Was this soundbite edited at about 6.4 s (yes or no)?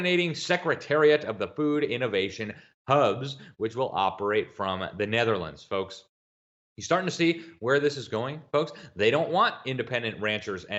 no